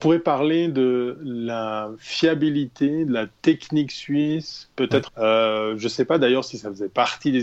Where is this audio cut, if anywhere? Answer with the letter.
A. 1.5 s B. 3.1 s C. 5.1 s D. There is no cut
C